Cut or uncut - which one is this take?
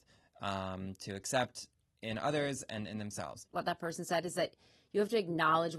cut